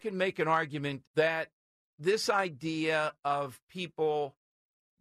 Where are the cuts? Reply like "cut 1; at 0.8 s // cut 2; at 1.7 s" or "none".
cut 1; at 1.0 s